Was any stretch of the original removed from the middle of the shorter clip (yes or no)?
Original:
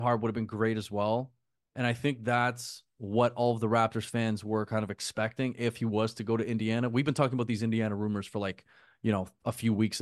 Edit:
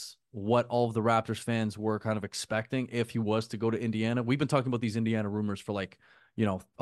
no